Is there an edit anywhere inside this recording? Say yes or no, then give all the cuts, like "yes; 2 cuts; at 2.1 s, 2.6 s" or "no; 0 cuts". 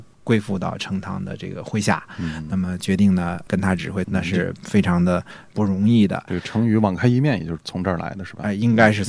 yes; 1 cut; at 4.0 s